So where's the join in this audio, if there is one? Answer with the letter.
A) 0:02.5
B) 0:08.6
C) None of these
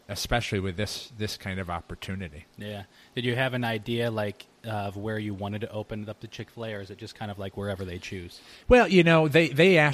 C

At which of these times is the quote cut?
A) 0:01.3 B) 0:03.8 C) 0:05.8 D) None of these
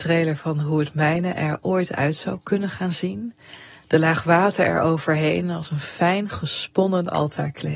D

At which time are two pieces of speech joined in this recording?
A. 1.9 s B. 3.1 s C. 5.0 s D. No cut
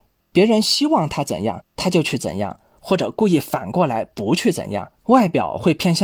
C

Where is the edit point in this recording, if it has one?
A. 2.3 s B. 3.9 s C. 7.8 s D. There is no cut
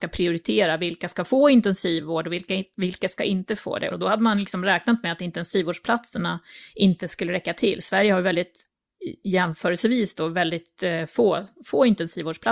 B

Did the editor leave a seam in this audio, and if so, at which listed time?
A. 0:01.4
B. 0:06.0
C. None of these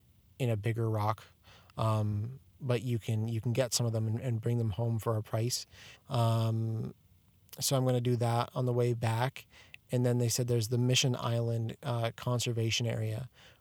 B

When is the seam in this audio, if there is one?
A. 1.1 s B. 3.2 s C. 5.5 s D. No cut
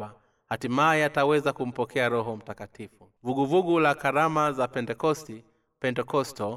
B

